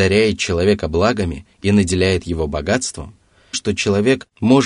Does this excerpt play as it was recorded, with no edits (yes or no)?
no